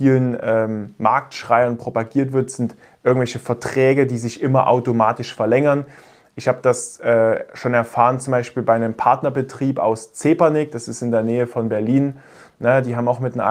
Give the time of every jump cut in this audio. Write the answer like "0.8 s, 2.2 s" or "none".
none